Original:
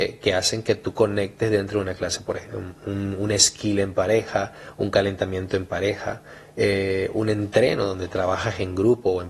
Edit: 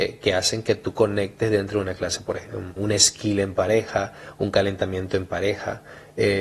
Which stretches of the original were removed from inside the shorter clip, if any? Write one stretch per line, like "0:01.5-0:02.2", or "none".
0:02.8-0:03.2